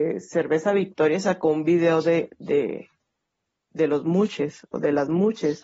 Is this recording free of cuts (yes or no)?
yes